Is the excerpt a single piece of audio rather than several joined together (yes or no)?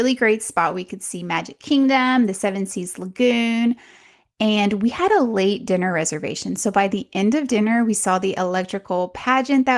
yes